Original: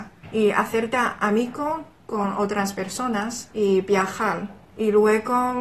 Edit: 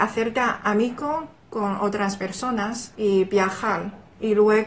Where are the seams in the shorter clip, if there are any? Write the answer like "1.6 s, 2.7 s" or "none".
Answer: none